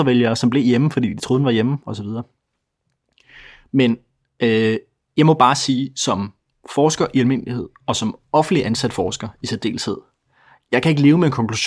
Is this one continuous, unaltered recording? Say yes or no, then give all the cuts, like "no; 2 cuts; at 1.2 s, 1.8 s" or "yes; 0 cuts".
yes; 0 cuts